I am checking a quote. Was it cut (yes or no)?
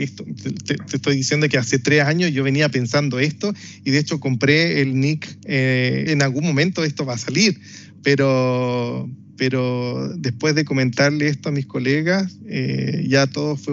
yes